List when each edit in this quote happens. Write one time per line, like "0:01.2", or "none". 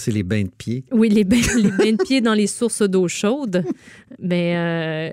none